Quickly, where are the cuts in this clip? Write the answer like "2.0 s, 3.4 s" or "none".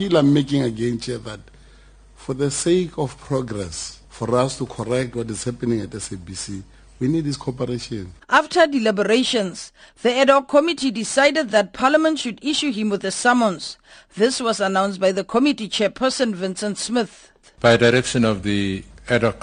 none